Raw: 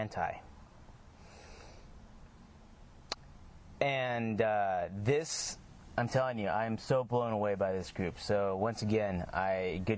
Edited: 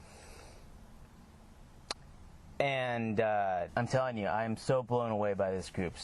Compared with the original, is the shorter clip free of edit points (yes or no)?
no